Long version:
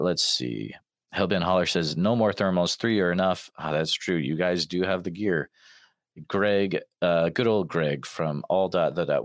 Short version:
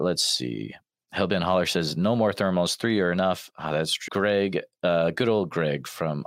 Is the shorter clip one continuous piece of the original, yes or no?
no